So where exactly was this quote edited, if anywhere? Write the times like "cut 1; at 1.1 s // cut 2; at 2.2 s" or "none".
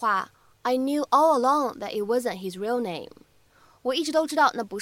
none